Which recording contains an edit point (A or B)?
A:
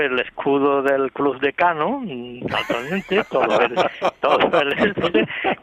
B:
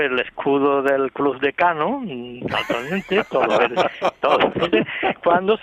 B